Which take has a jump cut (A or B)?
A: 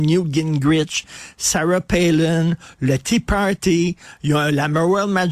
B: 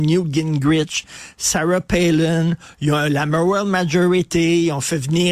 B